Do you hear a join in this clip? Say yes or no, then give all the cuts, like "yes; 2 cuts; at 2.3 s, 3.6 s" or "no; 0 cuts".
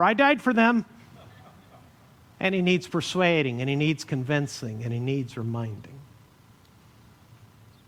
no; 0 cuts